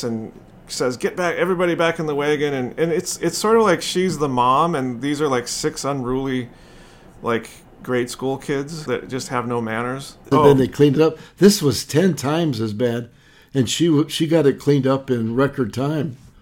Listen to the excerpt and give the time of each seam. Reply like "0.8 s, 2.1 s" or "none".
10.3 s